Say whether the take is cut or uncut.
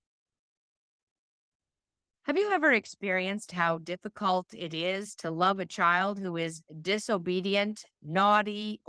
cut